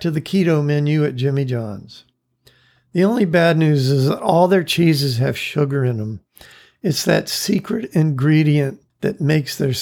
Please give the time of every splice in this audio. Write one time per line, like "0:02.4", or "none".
none